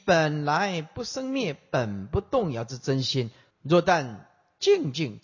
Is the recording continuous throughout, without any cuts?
no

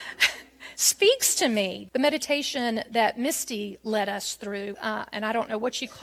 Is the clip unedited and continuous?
no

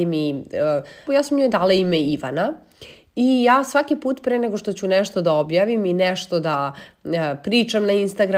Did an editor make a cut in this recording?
yes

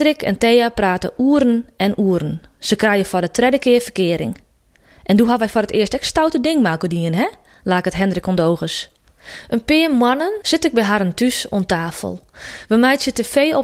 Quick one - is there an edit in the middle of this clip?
yes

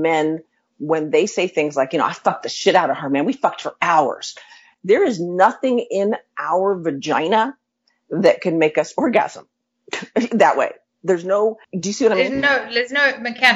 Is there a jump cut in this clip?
no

